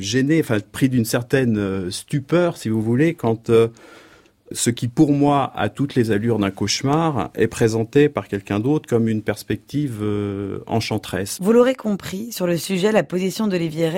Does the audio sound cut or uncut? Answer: uncut